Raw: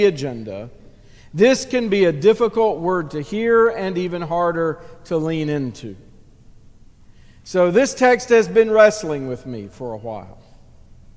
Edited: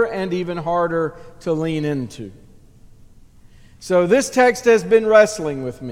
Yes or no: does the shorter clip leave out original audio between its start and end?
no